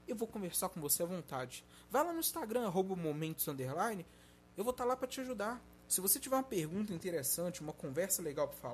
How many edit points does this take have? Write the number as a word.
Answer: one